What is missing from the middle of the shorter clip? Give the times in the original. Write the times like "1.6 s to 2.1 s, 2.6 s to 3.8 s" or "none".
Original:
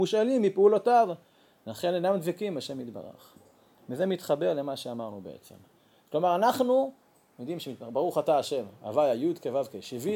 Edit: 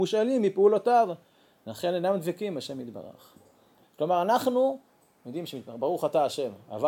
3.8 s to 6.0 s